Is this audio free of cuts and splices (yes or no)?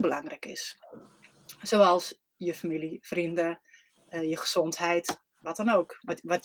yes